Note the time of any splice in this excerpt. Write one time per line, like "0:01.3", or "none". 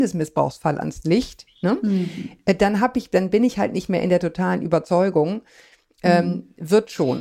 none